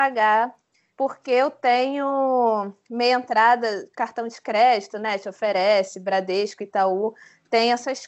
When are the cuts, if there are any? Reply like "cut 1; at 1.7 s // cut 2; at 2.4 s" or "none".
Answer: none